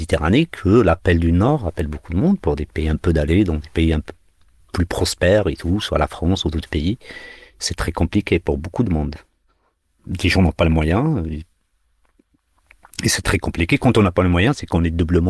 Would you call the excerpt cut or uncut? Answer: uncut